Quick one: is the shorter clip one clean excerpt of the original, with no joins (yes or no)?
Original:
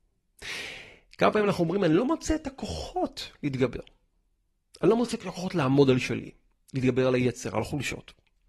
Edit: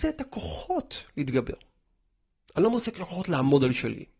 yes